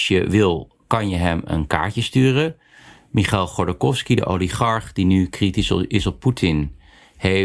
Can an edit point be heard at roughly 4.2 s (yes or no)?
no